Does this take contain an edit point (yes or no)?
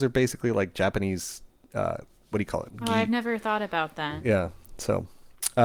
no